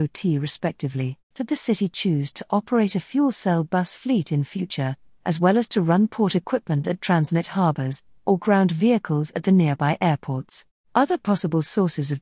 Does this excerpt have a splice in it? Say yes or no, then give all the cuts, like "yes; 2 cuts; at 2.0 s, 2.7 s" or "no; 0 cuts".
yes; 2 cuts; at 1.3 s, 10.8 s